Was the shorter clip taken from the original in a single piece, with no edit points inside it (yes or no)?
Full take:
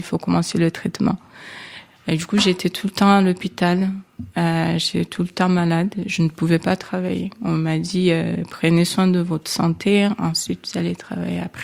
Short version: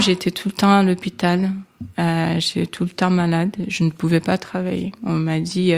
yes